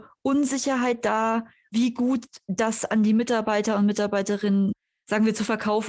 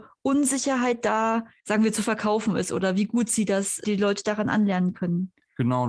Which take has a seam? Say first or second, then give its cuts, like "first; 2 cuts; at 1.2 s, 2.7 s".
second; 2 cuts; at 1.6 s, 3.8 s